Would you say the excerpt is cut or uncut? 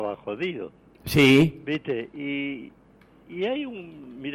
uncut